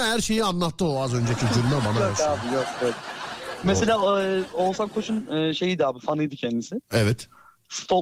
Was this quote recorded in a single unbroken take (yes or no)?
yes